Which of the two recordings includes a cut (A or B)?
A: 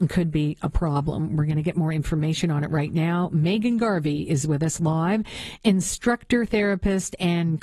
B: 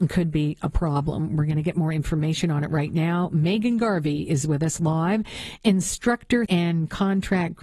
B